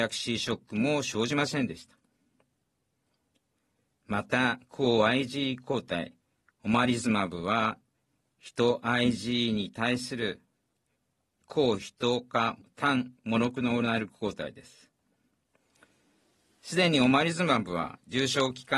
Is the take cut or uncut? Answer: uncut